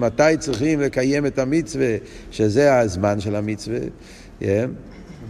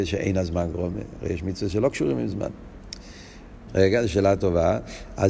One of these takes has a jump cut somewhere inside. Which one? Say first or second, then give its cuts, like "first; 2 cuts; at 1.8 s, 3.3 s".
second; 1 cut; at 3.7 s